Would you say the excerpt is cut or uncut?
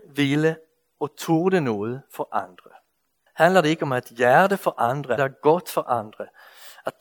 cut